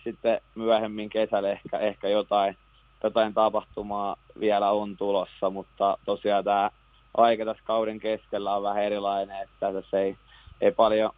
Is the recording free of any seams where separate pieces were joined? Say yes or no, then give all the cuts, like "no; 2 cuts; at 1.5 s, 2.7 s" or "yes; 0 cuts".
yes; 0 cuts